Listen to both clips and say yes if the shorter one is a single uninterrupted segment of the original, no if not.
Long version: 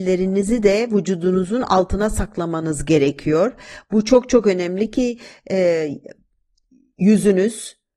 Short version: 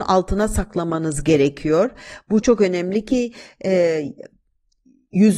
no